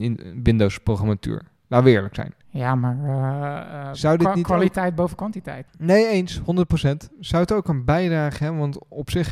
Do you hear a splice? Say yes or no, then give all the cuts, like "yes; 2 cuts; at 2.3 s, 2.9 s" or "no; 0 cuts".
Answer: yes; 3 cuts; at 2.4 s, 5.6 s, 7.1 s